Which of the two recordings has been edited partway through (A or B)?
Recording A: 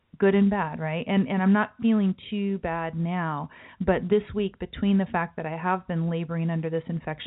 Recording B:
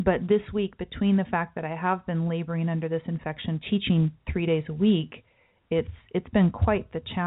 B